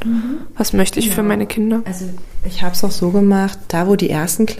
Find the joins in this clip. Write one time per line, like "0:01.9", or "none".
none